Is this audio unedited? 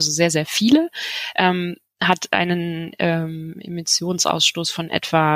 yes; 0 cuts

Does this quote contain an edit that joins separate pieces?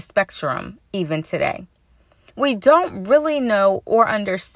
yes; 1 cut; at 2.3 s

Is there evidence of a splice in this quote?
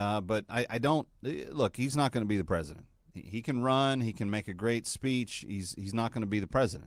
no; 0 cuts

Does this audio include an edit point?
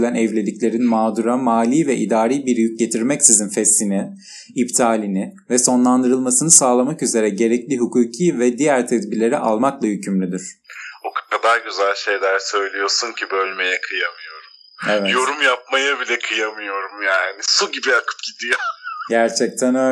no; 0 cuts

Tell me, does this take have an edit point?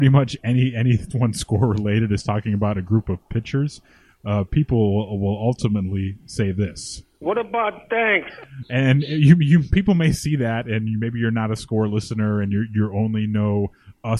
no; 0 cuts

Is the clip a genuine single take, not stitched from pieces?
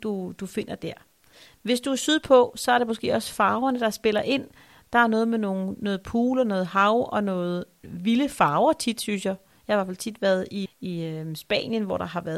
no; 1 cut; at 10.7 s

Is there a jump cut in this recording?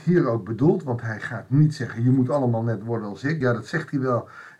no; 0 cuts

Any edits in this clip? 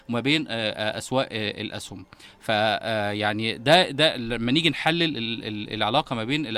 no; 0 cuts

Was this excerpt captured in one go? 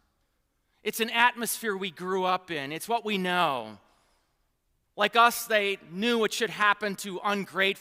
no; 1 cut; at 4.8 s

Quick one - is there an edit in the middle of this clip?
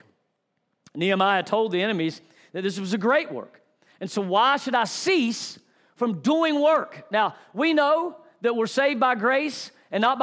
no; 0 cuts

